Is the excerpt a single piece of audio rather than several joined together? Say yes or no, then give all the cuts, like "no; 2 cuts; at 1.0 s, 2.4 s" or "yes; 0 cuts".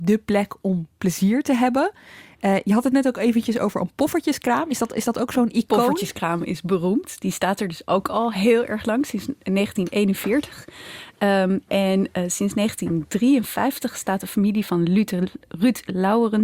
yes; 0 cuts